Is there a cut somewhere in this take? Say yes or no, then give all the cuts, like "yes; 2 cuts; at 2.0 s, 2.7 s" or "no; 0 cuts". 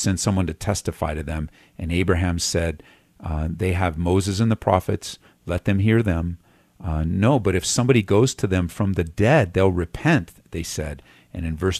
no; 0 cuts